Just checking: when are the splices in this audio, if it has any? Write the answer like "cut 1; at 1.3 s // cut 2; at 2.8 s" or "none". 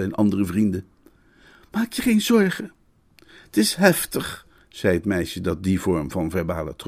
none